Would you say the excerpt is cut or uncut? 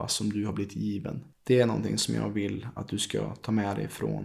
cut